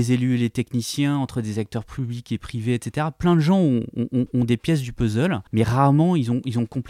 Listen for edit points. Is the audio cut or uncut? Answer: cut